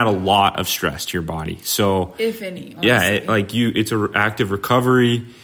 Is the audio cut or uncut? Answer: uncut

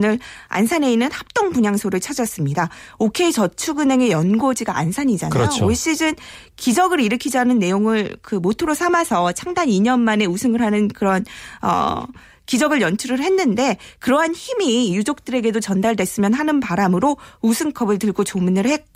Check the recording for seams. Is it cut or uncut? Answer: uncut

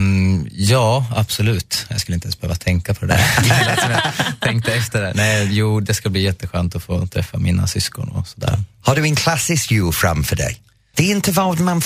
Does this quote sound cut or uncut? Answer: cut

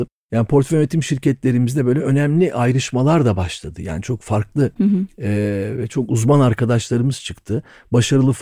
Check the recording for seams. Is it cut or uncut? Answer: uncut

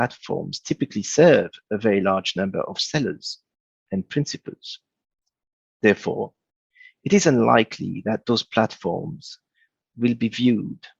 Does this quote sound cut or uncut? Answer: uncut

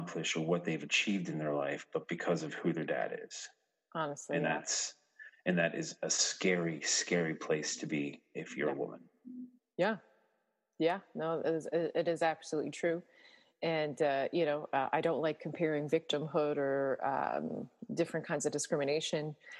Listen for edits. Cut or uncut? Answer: uncut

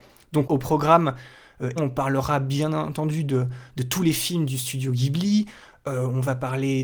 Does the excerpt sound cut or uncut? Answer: cut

